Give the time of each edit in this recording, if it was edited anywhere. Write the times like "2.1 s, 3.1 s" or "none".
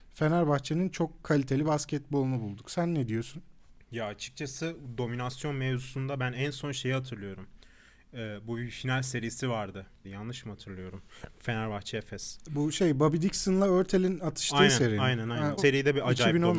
10.0 s, 15.6 s